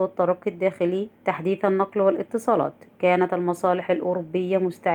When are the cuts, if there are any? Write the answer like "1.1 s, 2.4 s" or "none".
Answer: 1.2 s